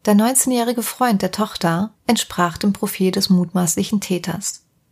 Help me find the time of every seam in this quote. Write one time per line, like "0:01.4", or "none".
0:01.9

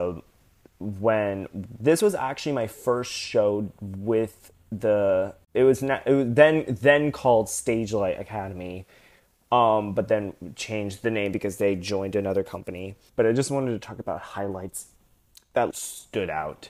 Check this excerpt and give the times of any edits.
0:13.1
0:15.7

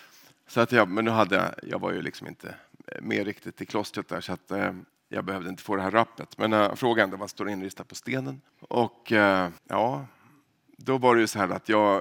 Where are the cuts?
0:08.5
0:09.6

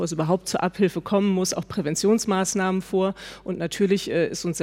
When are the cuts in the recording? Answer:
none

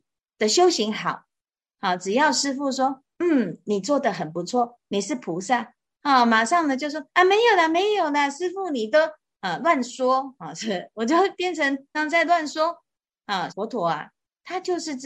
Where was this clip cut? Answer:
0:11.9
0:13.5

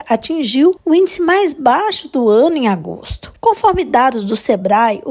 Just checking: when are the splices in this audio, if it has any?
0:03.3

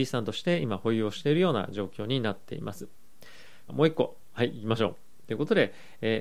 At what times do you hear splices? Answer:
0:03.7

